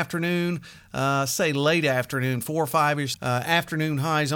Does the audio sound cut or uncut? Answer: cut